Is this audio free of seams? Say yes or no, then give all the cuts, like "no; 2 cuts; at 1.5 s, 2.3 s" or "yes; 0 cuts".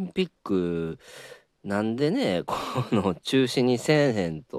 yes; 0 cuts